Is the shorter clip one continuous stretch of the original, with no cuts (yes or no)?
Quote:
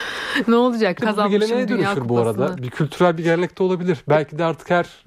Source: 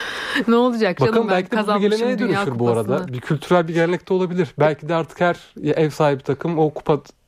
no